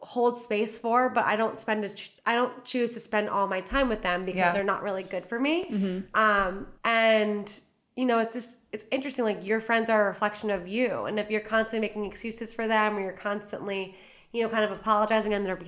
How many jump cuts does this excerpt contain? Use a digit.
2